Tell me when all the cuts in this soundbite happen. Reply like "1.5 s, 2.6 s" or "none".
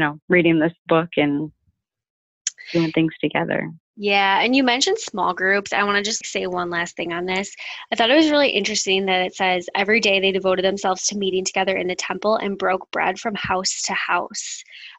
6.2 s